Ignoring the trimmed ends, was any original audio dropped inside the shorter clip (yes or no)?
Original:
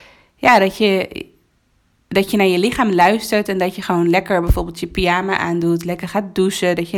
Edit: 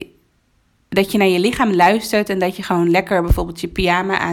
no